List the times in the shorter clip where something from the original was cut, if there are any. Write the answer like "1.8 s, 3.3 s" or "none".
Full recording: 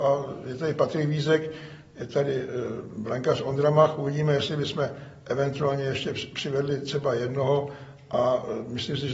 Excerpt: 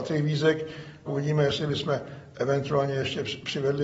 1.1 s